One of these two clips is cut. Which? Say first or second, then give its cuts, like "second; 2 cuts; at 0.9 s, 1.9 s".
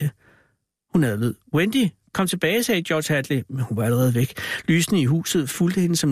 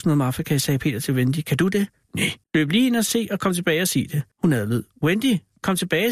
second; 2 cuts; at 2.4 s, 4.3 s